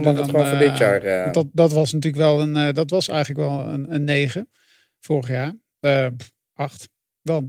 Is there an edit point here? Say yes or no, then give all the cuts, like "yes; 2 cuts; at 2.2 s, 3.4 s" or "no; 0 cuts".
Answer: no; 0 cuts